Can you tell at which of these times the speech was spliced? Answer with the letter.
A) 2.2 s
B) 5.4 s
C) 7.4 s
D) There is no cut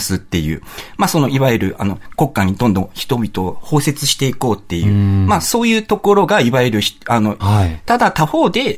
C